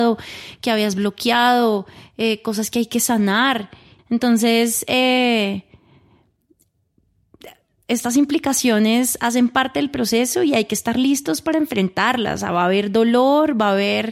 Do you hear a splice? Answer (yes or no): yes